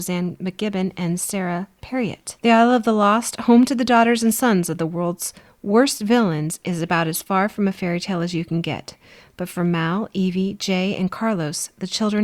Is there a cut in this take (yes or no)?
yes